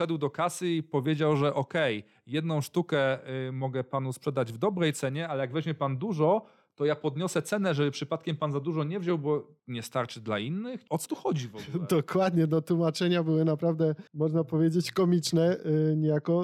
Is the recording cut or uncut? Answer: cut